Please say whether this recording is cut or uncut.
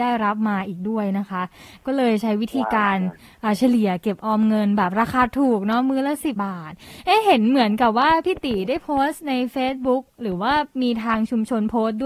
cut